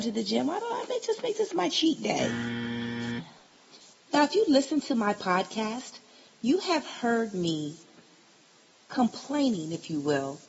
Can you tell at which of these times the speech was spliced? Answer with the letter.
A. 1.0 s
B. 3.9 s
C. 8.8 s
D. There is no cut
B